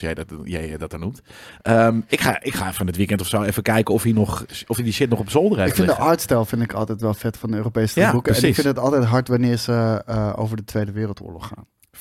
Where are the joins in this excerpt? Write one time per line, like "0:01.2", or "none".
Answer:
none